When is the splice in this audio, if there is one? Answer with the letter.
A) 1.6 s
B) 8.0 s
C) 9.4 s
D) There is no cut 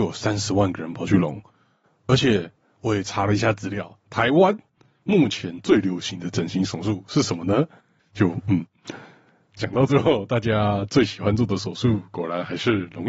B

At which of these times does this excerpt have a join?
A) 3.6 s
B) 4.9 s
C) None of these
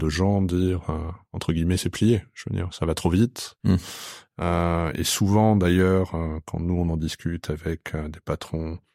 C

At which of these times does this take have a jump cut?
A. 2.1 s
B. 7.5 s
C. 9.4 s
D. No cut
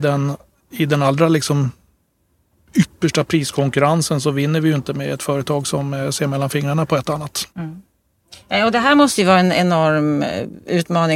B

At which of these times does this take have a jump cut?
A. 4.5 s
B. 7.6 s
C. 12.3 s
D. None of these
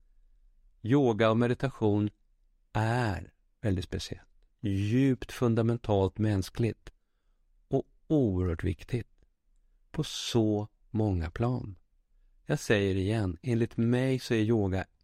A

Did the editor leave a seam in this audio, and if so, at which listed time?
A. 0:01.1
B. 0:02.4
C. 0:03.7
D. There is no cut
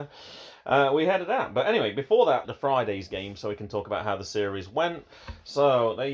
B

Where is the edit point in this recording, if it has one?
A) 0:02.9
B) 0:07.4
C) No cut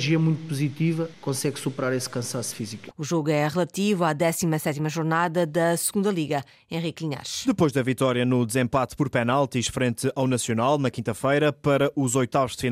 A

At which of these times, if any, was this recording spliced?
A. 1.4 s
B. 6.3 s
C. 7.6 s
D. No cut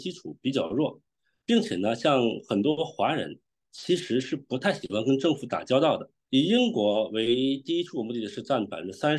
B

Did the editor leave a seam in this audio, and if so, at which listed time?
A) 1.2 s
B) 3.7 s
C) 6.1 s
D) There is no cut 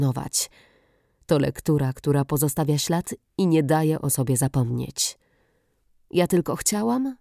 C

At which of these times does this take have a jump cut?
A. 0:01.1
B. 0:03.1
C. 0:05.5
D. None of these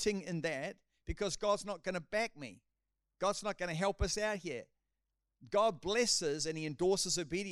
D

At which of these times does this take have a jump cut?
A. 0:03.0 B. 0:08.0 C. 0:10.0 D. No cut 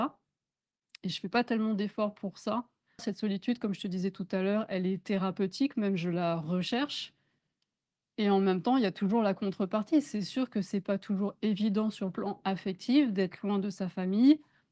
A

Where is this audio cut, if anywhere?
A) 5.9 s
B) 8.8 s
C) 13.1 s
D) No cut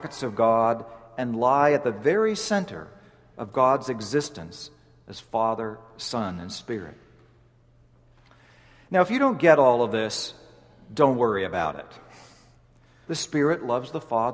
C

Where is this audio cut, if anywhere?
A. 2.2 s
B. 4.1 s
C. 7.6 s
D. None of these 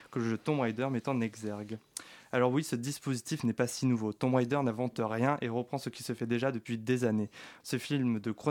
C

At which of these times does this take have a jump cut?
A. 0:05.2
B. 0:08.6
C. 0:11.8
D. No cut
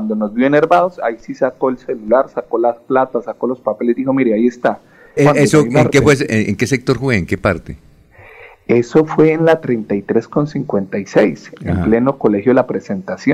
A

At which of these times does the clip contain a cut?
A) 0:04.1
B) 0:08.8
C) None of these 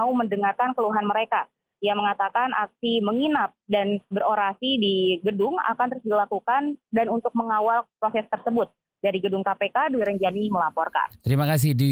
A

